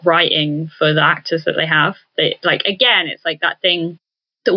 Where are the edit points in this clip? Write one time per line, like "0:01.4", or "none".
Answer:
none